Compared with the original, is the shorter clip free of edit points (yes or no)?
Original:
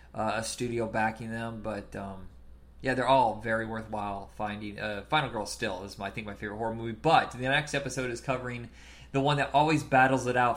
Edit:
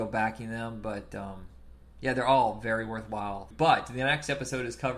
no